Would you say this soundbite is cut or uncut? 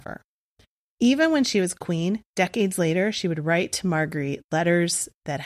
uncut